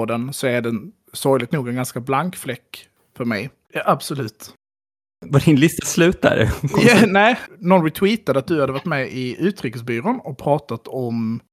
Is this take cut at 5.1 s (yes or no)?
no